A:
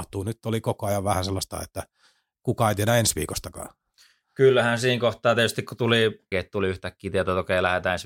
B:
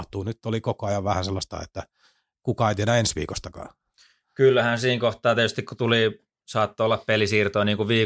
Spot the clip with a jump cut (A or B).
A